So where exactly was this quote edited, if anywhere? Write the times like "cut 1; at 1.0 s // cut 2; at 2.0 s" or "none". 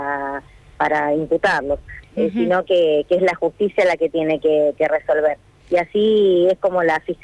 cut 1; at 2.0 s